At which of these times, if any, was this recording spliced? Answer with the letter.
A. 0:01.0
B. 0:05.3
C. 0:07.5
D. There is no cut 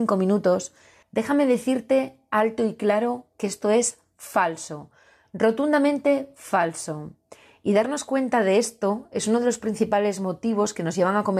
A